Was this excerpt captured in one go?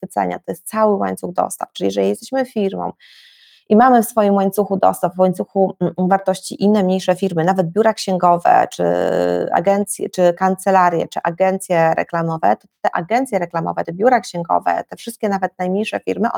yes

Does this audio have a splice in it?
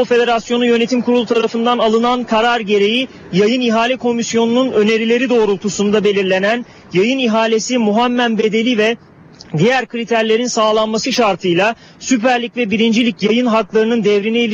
no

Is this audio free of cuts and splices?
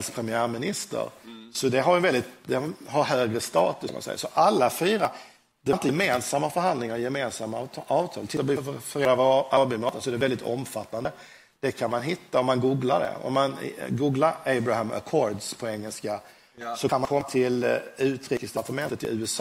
yes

